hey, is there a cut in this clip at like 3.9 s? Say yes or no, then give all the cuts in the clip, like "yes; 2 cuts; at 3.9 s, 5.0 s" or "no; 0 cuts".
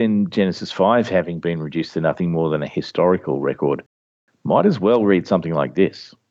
no; 0 cuts